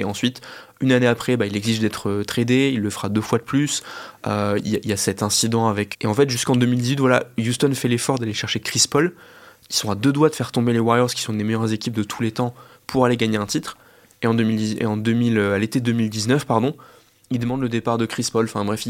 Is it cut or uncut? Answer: cut